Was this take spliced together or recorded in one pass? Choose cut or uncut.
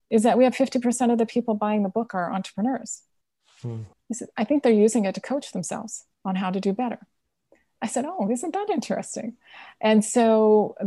cut